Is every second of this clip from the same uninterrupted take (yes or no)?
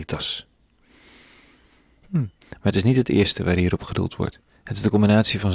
no